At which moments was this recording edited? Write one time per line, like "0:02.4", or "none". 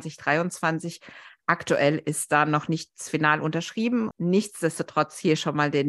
0:04.1